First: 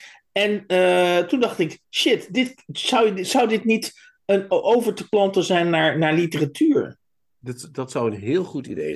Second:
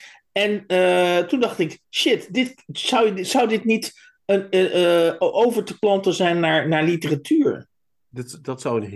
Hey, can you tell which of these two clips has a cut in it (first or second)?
first